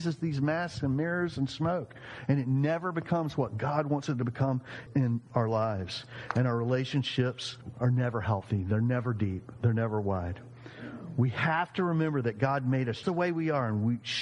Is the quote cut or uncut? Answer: cut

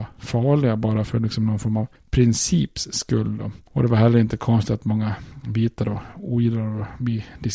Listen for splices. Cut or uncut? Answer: uncut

